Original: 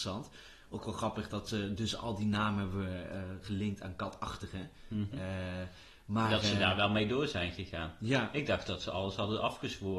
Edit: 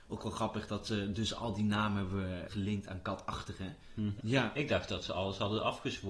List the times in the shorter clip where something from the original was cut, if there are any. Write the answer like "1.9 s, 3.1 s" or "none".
2.5 s, 4.2 s